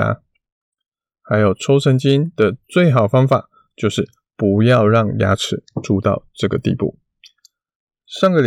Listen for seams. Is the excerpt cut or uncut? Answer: uncut